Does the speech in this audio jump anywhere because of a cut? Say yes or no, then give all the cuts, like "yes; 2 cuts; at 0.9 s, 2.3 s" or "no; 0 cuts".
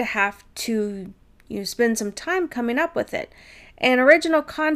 no; 0 cuts